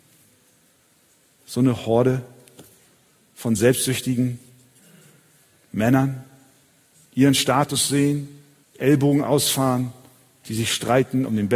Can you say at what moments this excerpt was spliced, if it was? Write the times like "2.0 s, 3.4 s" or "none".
1.4 s, 7.0 s, 8.6 s